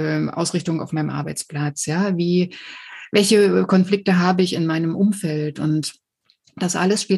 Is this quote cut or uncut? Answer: uncut